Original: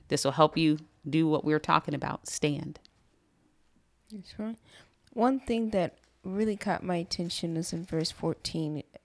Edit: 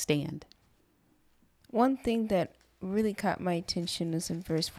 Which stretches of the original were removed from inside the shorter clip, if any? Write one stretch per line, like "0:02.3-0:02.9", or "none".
0:03.9-0:05.0